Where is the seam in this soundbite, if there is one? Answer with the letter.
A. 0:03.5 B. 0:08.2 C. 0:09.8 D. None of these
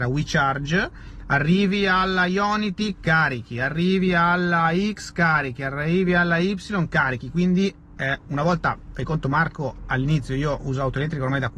B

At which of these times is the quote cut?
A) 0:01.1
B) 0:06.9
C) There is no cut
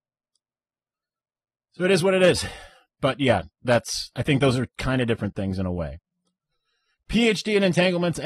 C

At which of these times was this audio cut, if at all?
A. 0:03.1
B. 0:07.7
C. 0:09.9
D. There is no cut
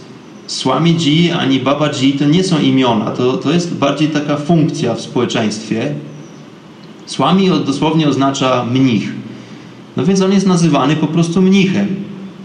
D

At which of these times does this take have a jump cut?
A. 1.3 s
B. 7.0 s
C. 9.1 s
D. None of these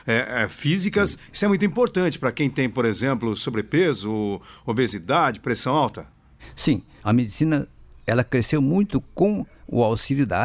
B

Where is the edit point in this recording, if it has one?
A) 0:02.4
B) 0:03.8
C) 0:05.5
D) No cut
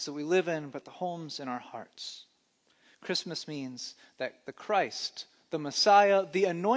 D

